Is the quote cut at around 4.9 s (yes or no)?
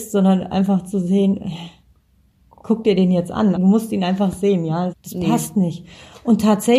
yes